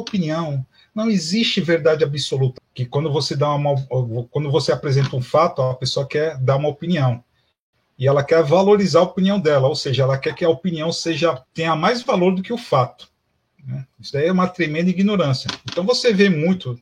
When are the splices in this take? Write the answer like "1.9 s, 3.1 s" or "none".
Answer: 2.6 s, 11.5 s